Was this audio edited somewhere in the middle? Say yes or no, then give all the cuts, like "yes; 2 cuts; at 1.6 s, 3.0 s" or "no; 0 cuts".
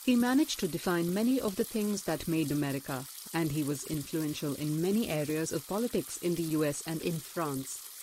yes; 2 cuts; at 3.2 s, 7.0 s